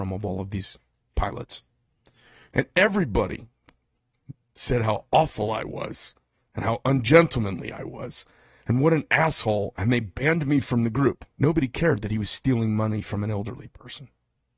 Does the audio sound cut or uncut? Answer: cut